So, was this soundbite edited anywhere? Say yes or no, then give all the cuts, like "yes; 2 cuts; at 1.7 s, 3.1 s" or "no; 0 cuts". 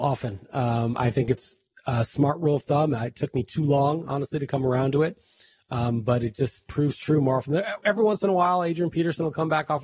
no; 0 cuts